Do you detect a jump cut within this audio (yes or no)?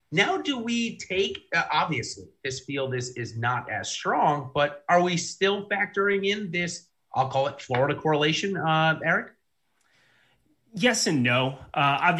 no